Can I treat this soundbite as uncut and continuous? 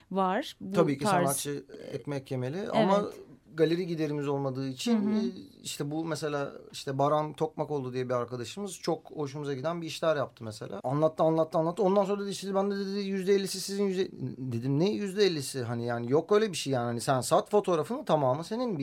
no; 1 cut; at 10.8 s

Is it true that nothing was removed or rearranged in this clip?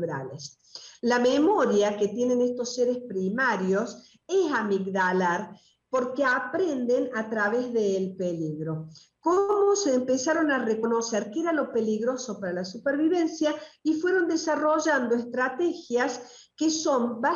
yes; 0 cuts

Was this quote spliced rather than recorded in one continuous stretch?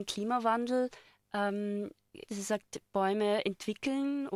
yes; 1 cut; at 2.3 s

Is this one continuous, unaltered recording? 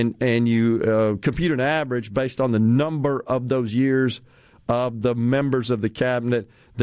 yes; 0 cuts

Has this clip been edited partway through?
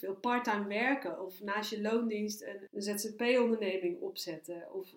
yes; 1 cut; at 2.7 s

